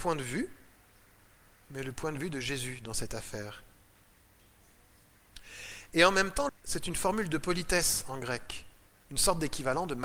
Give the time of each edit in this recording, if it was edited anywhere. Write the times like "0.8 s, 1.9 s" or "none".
6.5 s